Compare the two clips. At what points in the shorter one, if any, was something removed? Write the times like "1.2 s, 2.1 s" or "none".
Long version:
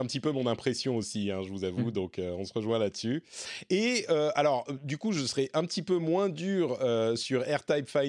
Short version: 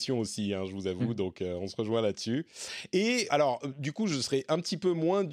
3.3 s